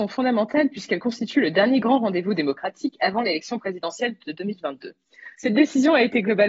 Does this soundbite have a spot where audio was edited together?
yes; 1 cut; at 5.4 s

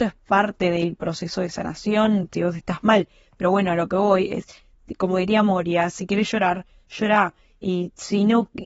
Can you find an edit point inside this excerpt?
no; 0 cuts

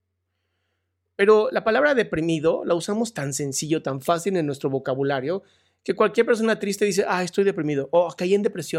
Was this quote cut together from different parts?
no; 0 cuts

